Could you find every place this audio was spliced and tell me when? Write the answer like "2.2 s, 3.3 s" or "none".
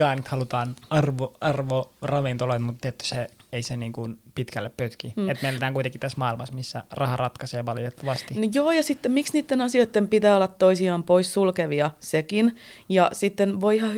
none